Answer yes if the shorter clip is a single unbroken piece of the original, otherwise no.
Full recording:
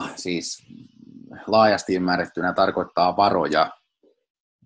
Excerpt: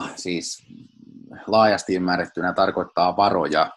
yes